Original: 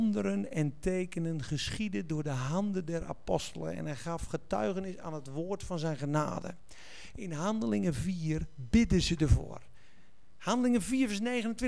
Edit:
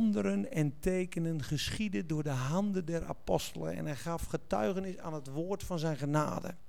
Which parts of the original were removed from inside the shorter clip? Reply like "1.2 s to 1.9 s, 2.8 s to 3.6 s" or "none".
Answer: none